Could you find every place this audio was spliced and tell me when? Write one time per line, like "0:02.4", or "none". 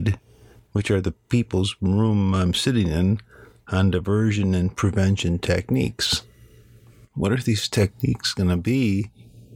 none